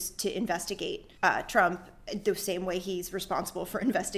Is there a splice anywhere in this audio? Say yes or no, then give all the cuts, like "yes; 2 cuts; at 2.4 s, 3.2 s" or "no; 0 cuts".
yes; 1 cut; at 1.2 s